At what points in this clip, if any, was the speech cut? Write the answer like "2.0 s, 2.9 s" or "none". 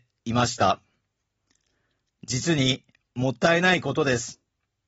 2.1 s